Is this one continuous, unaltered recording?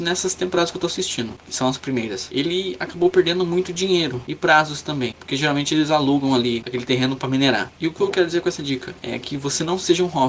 yes; 0 cuts

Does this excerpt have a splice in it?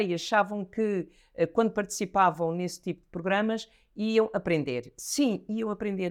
no; 0 cuts

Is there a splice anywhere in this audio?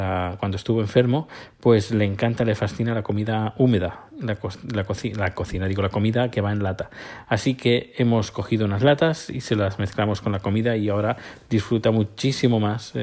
no; 0 cuts

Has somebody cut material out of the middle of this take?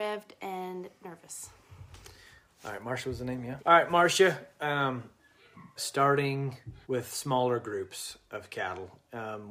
yes; 3 cuts; at 3.6 s, 5.8 s, 6.8 s

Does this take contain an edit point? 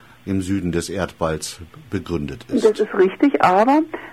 no; 0 cuts

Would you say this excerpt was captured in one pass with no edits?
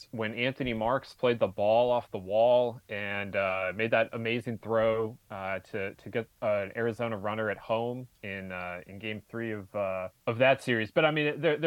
no; 1 cut; at 10.2 s

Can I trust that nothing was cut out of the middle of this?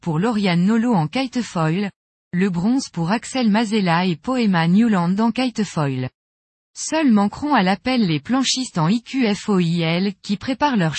no; 1 cut; at 2.1 s

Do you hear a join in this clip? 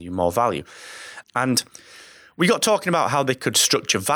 yes; 1 cut; at 1.2 s

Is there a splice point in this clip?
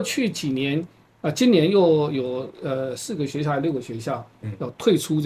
no; 0 cuts

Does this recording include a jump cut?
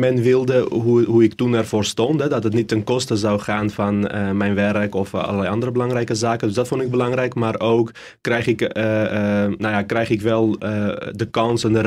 no; 0 cuts

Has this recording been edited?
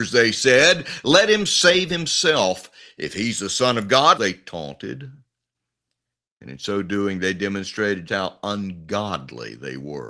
yes; 2 cuts; at 4.2 s, 8.1 s

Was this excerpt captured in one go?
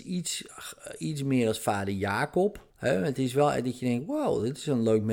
no; 1 cut; at 2.7 s

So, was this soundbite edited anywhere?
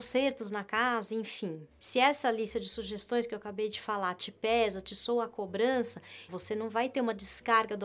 yes; 2 cuts; at 1.8 s, 6.3 s

